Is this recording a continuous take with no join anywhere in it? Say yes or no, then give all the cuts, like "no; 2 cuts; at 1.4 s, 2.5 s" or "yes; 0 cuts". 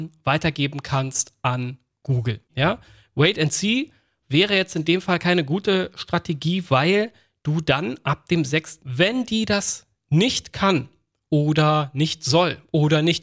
no; 2 cuts; at 2.5 s, 8.8 s